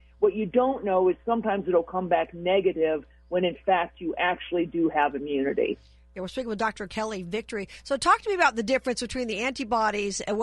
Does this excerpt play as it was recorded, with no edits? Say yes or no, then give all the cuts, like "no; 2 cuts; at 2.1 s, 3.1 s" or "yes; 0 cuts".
yes; 0 cuts